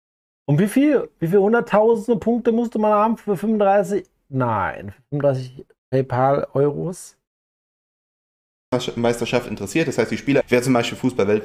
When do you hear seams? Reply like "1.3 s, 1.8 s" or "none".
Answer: 10.4 s